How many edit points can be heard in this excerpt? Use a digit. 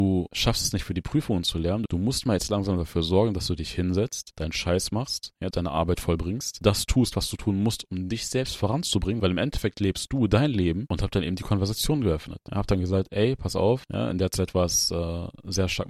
2